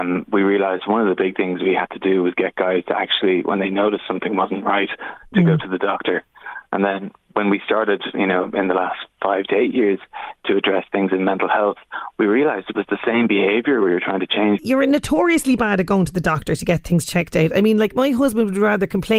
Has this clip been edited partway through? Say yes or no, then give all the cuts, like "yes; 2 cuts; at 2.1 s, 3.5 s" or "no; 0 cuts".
yes; 1 cut; at 14.6 s